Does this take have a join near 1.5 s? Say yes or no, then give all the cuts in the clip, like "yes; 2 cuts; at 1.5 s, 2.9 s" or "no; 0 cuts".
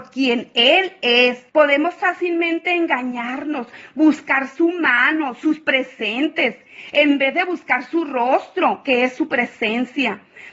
yes; 1 cut; at 1.5 s